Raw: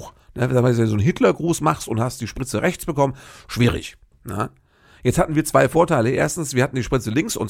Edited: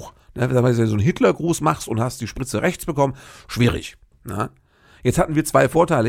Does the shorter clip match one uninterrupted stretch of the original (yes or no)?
yes